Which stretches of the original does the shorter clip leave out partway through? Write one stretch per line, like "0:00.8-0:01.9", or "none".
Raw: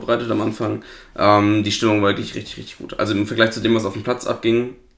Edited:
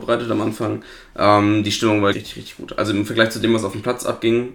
0:02.1-0:02.3

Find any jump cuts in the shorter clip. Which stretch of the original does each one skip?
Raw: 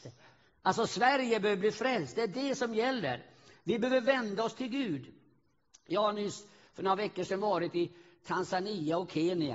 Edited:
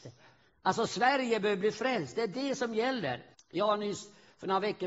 0:03.3-0:05.7

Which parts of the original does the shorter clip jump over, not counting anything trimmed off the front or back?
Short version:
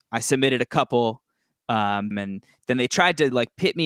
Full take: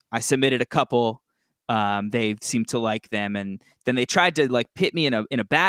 0:02.1-0:03.3

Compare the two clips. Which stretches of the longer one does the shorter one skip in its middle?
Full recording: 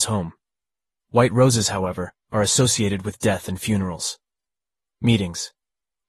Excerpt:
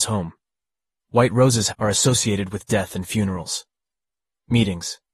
0:01.7-0:02.2

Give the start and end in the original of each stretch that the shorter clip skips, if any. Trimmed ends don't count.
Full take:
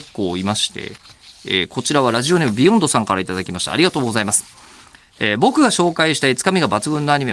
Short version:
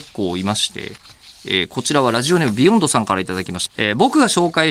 0:03.7-0:05.1

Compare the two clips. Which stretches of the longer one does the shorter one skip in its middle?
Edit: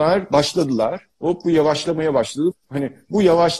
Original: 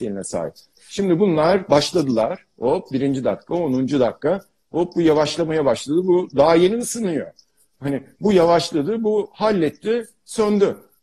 0:02.5-0:04.6
0:06.0-0:07.6

